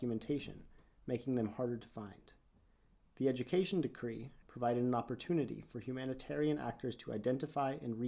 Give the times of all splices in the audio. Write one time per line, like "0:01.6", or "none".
0:04.4

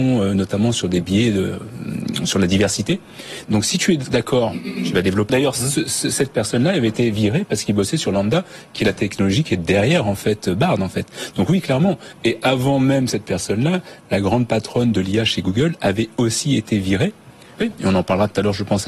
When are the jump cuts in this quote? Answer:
0:03.4
0:05.3
0:17.6

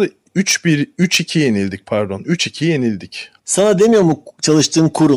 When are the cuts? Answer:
0:03.4

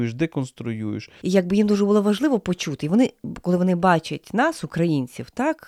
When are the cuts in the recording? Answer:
0:01.2

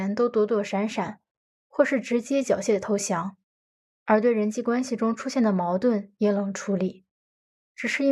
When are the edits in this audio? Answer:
none

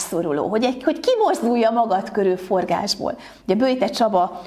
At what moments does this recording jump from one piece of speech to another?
none

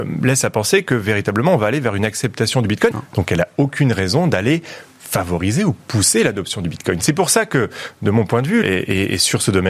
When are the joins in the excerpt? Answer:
0:02.9
0:08.6

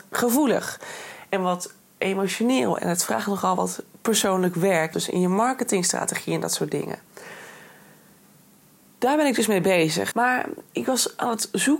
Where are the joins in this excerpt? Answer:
0:04.9
0:10.1

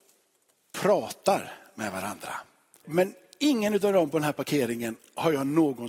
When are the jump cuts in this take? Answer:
0:02.8

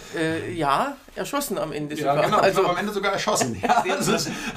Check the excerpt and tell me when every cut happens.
none

